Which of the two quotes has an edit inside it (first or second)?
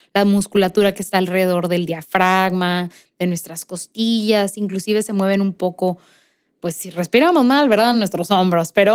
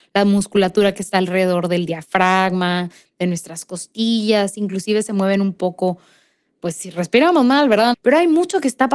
second